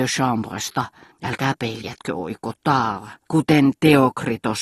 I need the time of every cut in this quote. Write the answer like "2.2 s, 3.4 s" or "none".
1.1 s, 3.3 s